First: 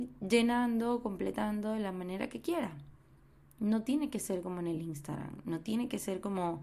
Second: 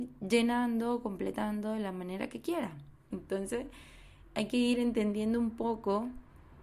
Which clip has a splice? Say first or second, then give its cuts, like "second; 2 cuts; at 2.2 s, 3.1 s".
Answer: second; 1 cut; at 3.1 s